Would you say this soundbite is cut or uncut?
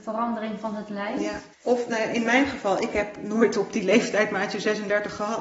cut